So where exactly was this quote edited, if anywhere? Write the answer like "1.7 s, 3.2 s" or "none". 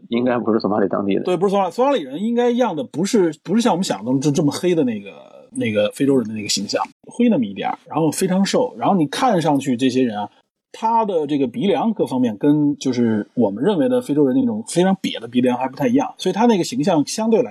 6.9 s